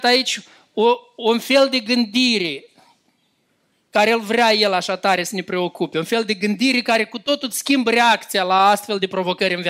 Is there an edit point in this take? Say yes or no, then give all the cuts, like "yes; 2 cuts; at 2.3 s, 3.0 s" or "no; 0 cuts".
no; 0 cuts